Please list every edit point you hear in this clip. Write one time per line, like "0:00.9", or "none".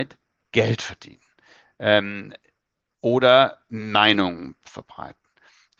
none